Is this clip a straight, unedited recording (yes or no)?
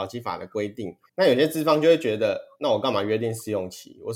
no